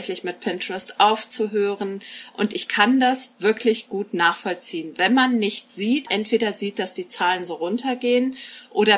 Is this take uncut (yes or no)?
no